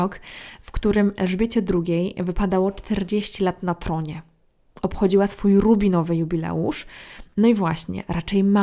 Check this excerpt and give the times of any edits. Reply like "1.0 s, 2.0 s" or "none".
none